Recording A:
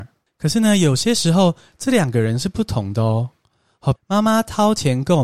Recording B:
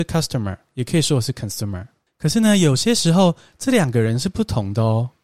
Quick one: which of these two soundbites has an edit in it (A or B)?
A